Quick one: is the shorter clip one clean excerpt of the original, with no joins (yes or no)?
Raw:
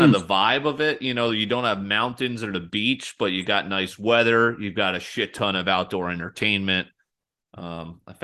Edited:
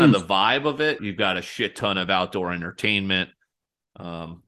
no